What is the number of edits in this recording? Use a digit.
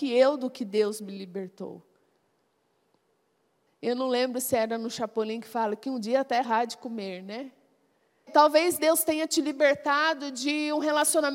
2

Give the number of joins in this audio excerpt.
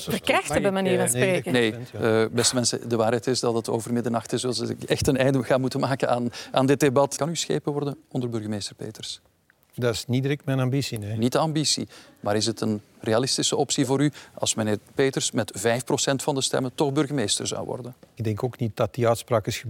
2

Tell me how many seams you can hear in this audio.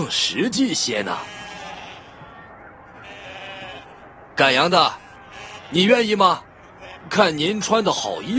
2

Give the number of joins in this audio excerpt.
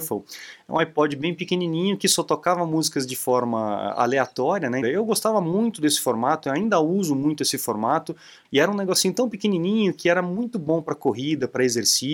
2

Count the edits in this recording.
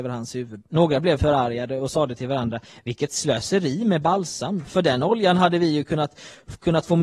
0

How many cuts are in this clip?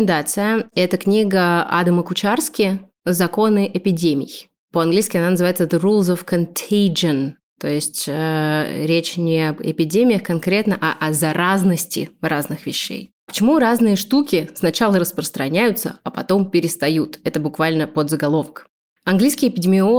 0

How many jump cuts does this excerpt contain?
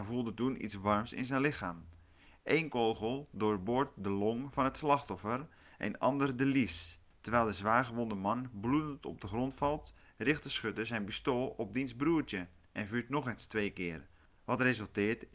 1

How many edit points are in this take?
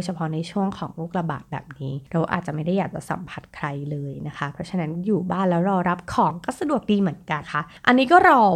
1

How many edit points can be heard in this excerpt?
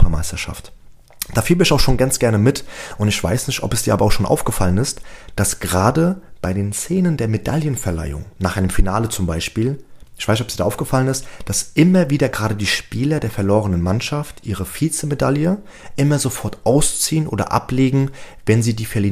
0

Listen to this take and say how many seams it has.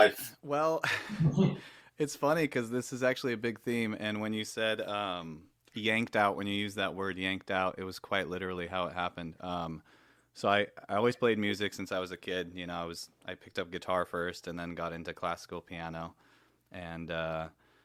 0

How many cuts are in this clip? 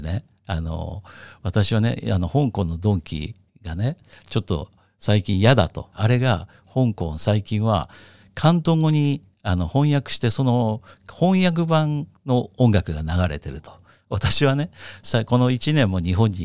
1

